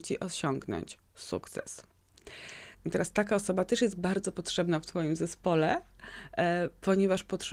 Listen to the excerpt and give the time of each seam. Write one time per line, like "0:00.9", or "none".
0:02.7